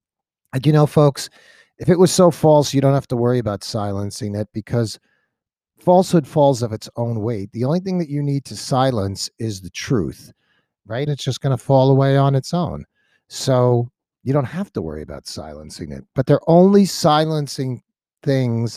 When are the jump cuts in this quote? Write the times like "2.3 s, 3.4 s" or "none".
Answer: 11.1 s